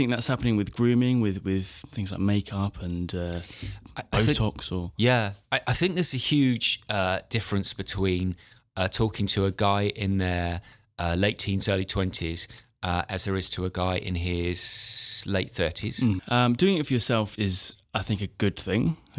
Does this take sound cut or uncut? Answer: cut